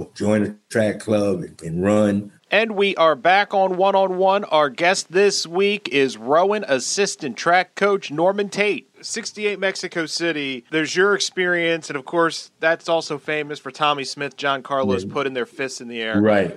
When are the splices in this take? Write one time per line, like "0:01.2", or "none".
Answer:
0:02.4